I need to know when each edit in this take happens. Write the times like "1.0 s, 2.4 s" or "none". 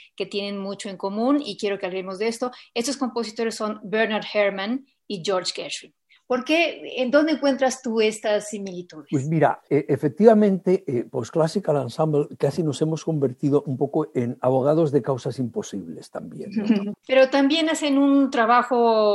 16.9 s

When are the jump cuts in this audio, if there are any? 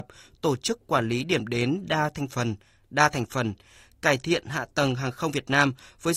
none

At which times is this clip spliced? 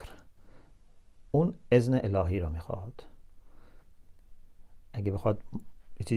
1.3 s

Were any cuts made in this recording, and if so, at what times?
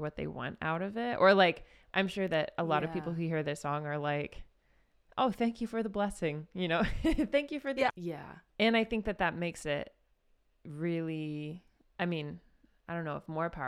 7.9 s, 12.0 s

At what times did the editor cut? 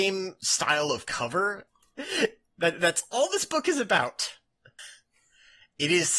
1.7 s, 4.8 s

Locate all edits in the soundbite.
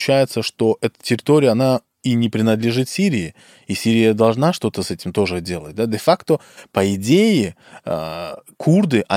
none

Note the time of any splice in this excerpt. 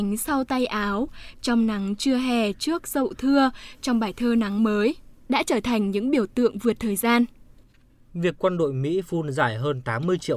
8.1 s

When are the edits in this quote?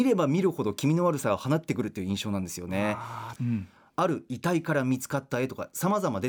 3.4 s

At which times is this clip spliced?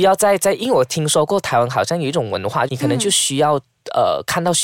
2.7 s

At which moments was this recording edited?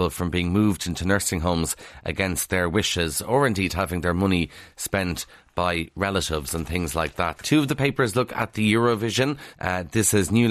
7.4 s, 9.5 s

